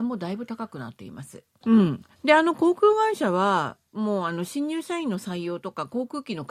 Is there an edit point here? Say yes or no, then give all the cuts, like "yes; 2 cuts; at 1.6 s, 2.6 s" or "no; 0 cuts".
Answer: yes; 1 cut; at 1.6 s